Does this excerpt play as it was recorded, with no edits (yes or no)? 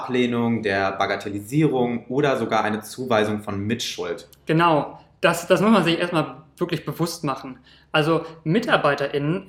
yes